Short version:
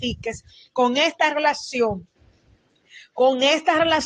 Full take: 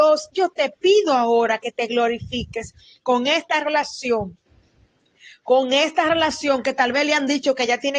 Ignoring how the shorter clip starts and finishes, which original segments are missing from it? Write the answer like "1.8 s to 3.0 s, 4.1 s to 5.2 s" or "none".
none